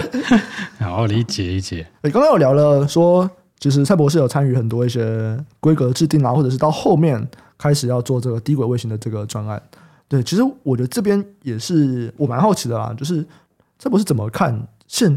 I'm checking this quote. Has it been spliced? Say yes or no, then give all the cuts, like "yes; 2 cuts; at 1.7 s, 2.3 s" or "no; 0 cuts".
no; 0 cuts